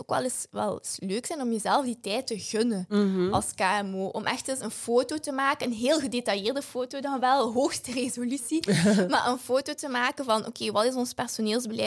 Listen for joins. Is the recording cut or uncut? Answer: cut